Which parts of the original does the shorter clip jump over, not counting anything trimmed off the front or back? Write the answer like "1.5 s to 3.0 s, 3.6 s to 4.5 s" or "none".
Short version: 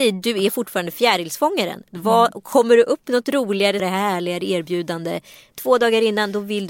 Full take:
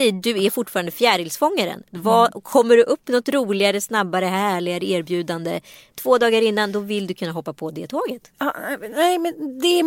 3.8 s to 4.2 s